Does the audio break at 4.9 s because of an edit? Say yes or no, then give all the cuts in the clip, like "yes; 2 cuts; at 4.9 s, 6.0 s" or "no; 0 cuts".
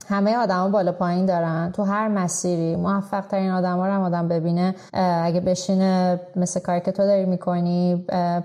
yes; 1 cut; at 4.9 s